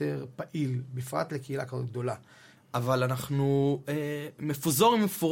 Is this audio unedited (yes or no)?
no